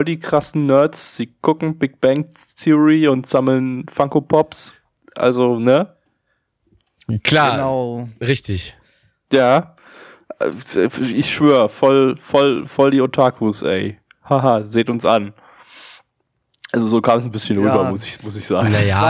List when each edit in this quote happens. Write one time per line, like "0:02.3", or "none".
none